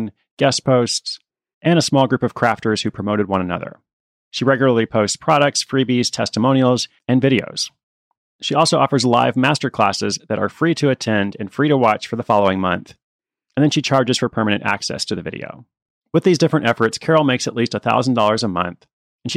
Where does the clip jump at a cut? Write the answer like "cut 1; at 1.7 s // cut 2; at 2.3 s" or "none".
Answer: cut 1; at 4.3 s